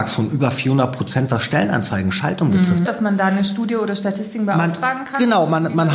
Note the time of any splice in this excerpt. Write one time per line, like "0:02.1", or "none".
0:02.9